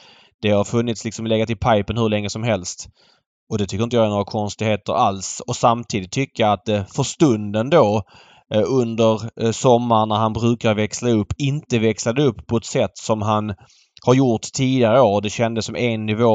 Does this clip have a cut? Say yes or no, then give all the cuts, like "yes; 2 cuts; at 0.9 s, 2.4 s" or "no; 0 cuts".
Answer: no; 0 cuts